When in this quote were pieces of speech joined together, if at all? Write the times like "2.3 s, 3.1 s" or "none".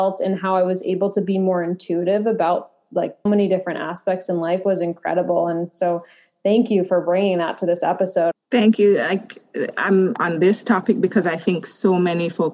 3.3 s, 8.3 s, 10.2 s

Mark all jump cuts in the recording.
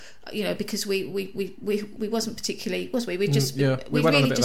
2.0 s

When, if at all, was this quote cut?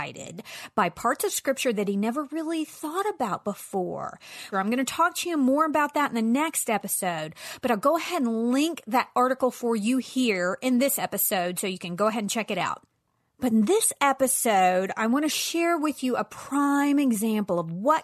4.5 s

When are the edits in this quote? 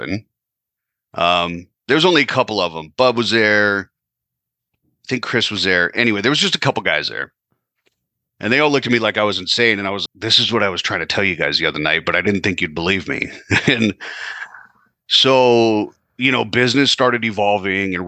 10.1 s

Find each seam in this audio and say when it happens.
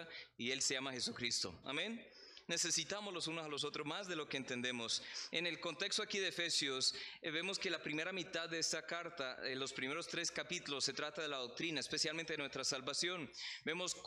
1.6 s, 5.3 s

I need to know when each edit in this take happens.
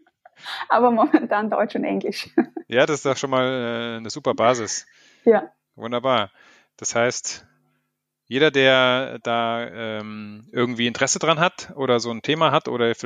none

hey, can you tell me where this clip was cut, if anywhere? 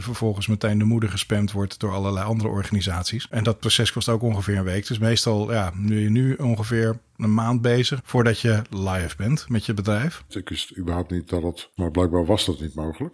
8.0 s, 10.3 s, 11.8 s

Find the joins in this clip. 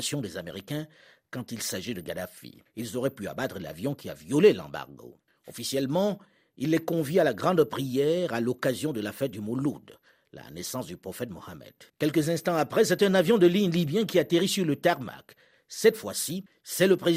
5.3 s, 11.9 s

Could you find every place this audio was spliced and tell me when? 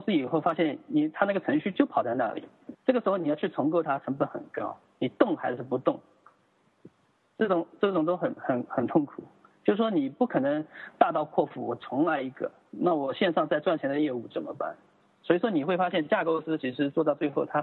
2.7 s, 8.4 s

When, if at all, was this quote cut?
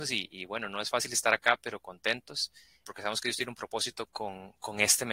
2.8 s, 4.1 s

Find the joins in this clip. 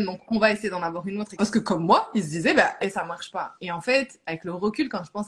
1.4 s, 2.8 s

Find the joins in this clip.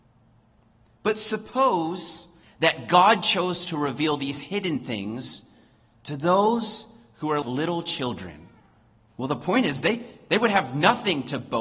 2.4 s, 7.4 s, 9.0 s

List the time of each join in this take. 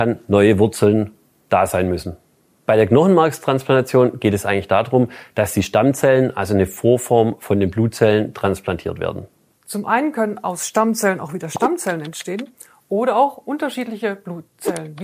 9.6 s

